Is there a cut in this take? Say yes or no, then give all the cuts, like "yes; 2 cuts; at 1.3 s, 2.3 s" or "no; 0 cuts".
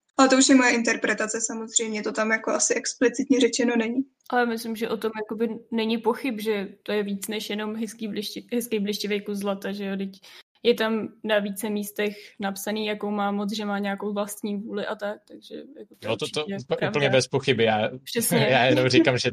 no; 0 cuts